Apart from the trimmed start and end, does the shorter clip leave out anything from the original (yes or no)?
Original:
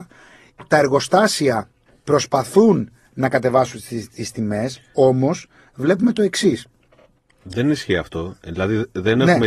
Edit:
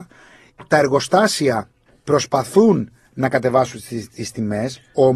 no